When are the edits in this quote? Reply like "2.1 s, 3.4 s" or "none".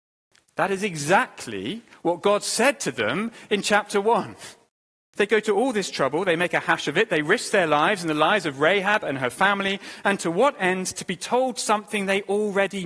5.1 s